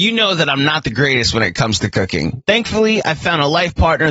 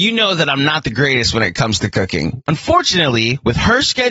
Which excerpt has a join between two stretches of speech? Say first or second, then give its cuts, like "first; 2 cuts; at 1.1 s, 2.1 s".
second; 1 cut; at 2.4 s